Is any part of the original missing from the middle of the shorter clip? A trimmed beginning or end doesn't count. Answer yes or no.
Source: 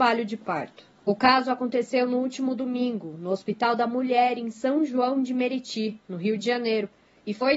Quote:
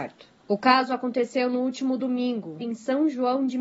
yes